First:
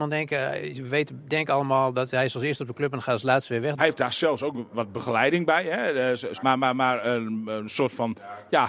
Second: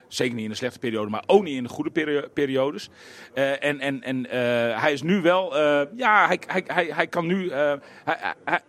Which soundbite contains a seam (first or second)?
first